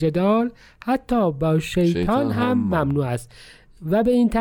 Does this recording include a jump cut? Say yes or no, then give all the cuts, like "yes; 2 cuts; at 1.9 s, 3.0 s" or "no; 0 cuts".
no; 0 cuts